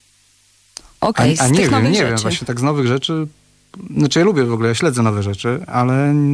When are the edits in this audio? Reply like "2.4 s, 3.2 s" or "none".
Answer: none